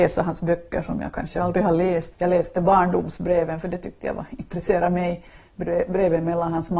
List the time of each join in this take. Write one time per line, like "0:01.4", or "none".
0:02.1